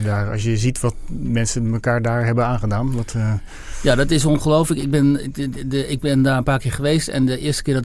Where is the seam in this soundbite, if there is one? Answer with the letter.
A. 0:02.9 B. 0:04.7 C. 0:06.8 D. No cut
D